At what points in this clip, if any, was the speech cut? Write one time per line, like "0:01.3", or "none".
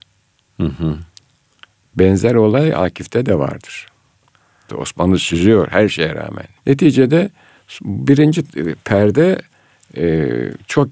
0:04.7
0:06.6